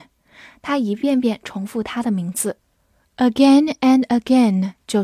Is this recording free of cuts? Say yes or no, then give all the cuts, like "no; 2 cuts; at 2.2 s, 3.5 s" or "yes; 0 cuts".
yes; 0 cuts